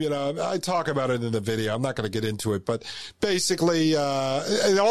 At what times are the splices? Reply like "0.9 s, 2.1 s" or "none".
none